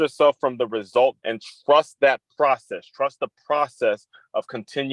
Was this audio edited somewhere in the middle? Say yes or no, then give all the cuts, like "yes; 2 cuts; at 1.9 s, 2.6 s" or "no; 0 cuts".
yes; 1 cut; at 1.2 s